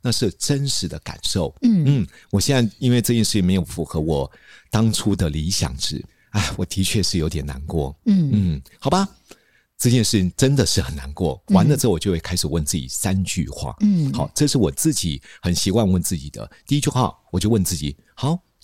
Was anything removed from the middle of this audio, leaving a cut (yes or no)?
no